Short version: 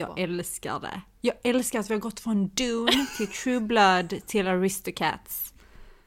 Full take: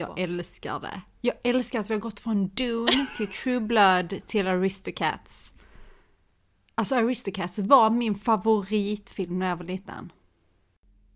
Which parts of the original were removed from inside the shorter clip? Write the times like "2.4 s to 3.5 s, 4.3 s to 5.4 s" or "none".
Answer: none

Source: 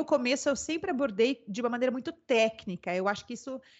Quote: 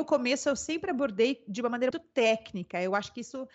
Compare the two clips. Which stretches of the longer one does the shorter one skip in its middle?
1.9 s to 2.0 s

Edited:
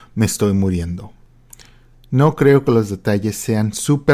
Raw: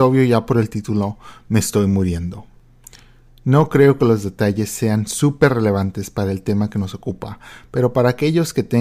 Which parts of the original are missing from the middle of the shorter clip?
none

